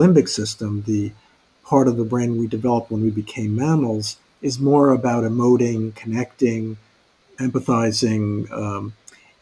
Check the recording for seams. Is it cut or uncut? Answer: uncut